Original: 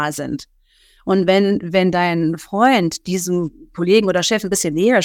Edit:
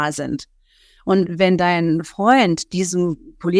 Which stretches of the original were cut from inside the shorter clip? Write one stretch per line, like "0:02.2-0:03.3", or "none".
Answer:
0:01.3-0:01.6